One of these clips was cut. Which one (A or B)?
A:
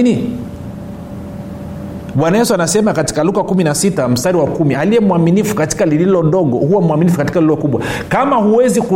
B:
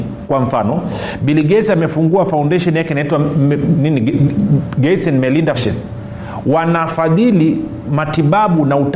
B